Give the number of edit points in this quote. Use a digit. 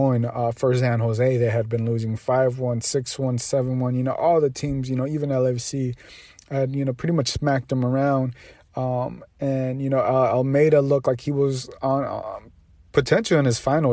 0